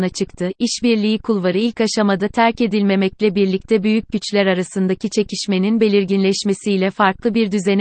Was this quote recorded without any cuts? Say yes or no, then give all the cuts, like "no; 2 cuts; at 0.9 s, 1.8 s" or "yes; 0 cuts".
yes; 0 cuts